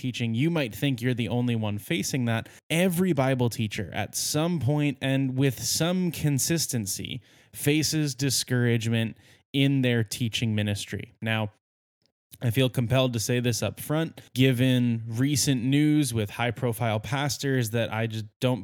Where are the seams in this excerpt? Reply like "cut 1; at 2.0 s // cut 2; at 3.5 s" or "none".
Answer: cut 1; at 2.6 s // cut 2; at 14.3 s